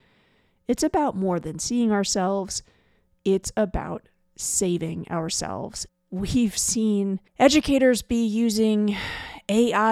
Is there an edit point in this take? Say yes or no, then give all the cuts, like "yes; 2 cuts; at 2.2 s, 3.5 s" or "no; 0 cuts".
yes; 2 cuts; at 5.9 s, 7.3 s